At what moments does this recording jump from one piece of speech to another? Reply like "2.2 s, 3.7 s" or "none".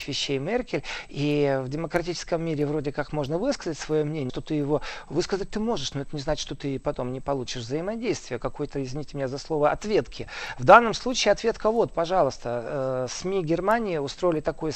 4.3 s